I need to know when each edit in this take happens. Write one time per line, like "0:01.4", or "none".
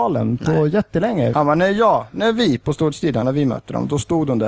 0:01.3
0:03.2